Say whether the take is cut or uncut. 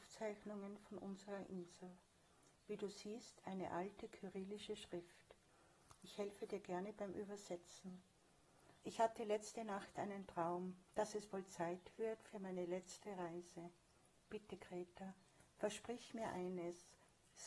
cut